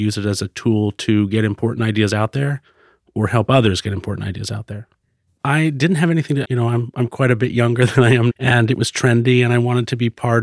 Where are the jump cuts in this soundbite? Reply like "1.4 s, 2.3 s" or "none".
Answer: 5.4 s, 6.4 s, 8.3 s